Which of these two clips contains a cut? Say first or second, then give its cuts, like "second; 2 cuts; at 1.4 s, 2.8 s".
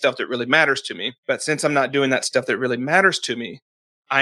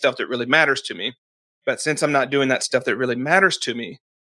first; 1 cut; at 1.2 s